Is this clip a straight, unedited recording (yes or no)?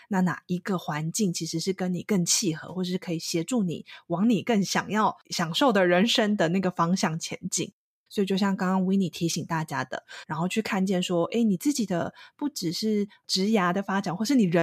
no